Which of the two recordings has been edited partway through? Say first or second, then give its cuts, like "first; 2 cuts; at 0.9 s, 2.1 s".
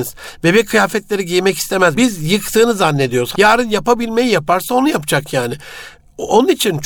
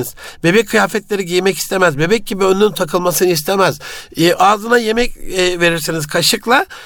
first; 2 cuts; at 2.0 s, 3.3 s